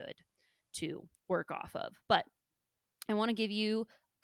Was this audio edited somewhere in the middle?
no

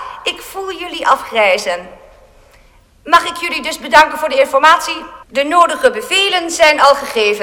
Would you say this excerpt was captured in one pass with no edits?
no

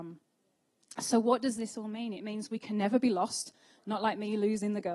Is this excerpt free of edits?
yes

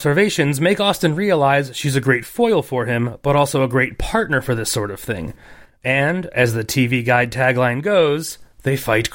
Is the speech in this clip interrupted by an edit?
no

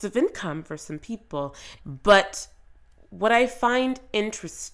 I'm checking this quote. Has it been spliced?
yes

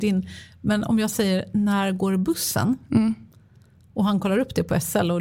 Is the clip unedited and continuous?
yes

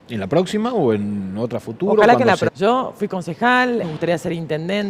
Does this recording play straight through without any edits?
no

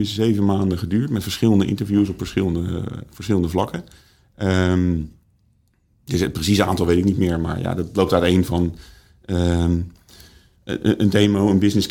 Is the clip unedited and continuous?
yes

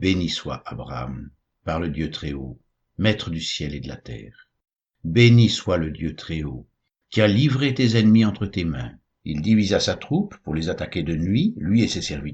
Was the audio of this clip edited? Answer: yes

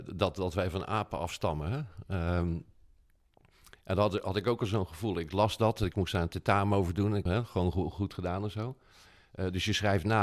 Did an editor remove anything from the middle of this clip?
yes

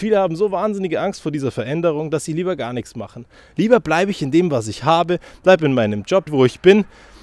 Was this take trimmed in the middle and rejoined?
yes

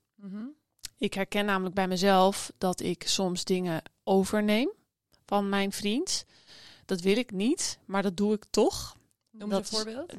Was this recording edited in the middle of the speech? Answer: no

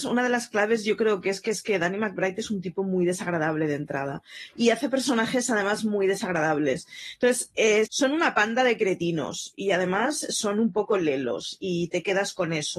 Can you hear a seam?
yes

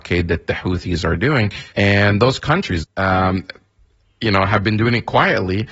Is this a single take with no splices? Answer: no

